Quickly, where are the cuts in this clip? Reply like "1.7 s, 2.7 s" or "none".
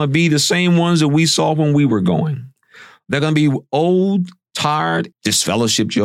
5.1 s